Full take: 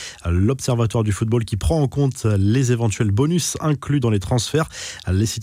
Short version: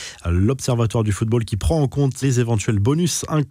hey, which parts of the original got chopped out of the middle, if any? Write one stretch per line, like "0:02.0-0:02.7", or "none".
0:02.2-0:02.5